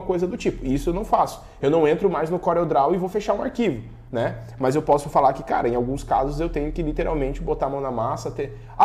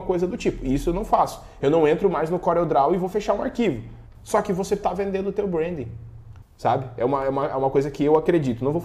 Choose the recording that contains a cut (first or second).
second